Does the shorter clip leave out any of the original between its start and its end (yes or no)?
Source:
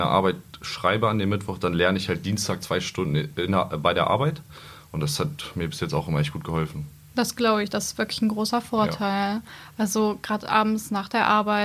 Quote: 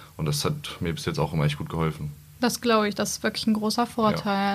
no